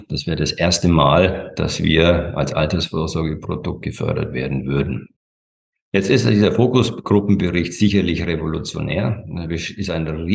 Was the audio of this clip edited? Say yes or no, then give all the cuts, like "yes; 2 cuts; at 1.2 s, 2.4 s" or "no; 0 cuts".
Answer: no; 0 cuts